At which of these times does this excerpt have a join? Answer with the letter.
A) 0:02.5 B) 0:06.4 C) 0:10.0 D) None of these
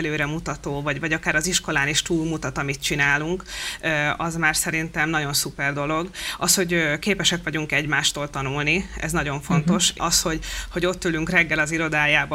C